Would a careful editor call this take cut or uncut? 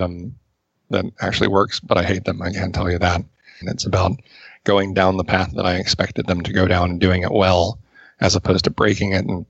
cut